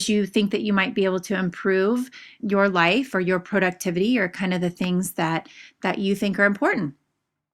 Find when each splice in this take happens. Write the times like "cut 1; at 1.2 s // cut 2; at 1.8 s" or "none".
cut 1; at 2.4 s